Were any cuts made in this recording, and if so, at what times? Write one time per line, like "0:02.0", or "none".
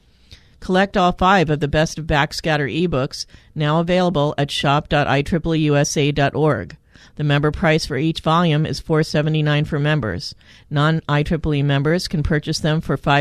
none